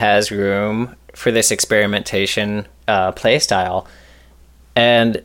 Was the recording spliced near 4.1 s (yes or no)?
no